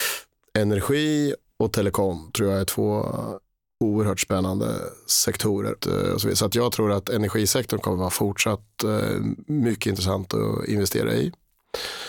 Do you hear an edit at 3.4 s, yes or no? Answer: no